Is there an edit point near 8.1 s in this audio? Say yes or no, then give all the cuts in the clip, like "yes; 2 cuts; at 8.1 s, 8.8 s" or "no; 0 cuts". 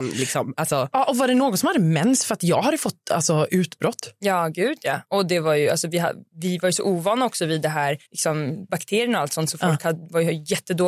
yes; 1 cut; at 8.1 s